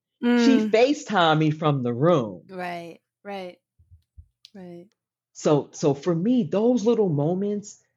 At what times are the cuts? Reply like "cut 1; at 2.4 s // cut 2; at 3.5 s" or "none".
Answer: none

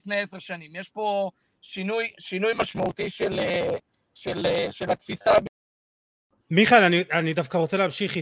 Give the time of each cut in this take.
none

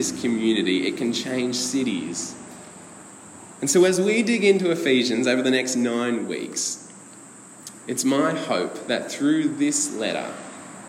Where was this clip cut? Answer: none

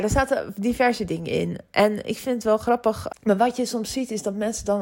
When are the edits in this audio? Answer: cut 1; at 3.1 s

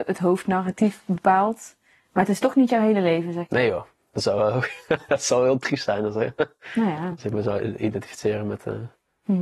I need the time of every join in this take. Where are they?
none

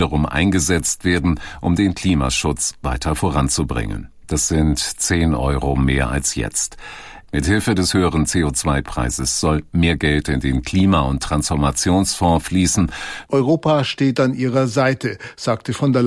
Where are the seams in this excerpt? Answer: cut 1; at 4.3 s // cut 2; at 7.2 s // cut 3; at 13.2 s

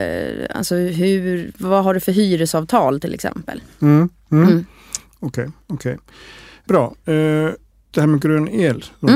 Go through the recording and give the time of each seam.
cut 1; at 7.9 s

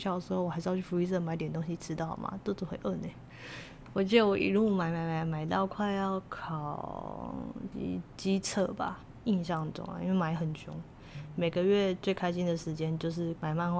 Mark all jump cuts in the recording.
cut 1; at 3.9 s

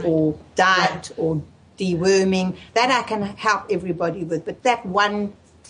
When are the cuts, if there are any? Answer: cut 1; at 4.6 s

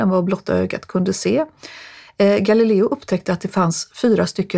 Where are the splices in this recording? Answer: none

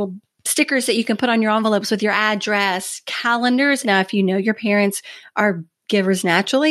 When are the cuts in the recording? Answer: cut 1; at 3.8 s

